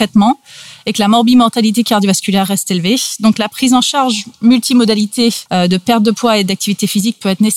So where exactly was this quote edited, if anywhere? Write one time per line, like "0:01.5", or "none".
0:05.5